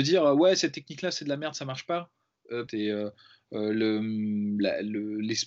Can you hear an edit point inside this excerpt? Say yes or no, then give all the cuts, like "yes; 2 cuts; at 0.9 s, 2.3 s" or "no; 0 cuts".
yes; 1 cut; at 2.7 s